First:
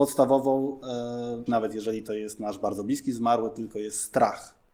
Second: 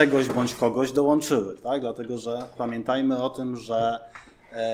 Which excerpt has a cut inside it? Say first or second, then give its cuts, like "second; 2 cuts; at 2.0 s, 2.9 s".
first; 1 cut; at 1.5 s